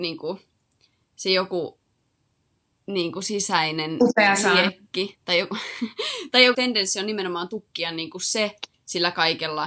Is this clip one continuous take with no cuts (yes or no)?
no